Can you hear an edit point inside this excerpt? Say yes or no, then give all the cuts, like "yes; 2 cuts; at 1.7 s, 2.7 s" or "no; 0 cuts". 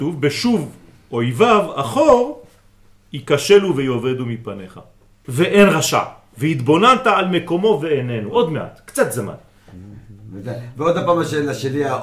yes; 1 cut; at 5.2 s